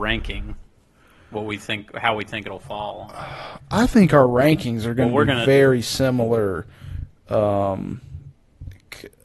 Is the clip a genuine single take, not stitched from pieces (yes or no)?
yes